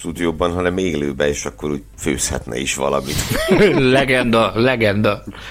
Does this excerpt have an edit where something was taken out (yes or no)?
yes